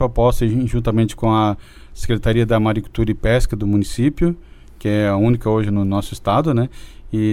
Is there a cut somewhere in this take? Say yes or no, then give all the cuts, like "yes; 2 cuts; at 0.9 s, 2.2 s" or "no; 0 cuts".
no; 0 cuts